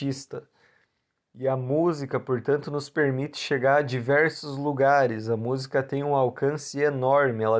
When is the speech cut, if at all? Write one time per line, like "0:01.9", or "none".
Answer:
0:01.1